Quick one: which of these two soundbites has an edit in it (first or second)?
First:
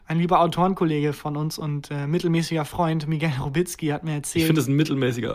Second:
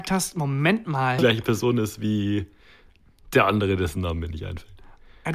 second